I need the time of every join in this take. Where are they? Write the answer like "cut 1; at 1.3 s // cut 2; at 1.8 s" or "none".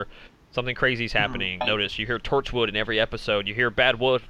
cut 1; at 1.6 s